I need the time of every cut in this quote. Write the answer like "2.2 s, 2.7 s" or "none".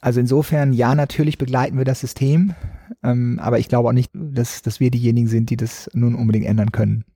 4.1 s